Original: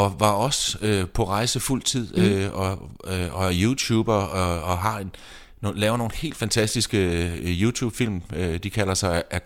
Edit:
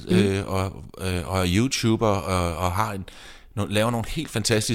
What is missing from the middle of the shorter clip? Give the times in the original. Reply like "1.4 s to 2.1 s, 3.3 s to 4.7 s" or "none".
none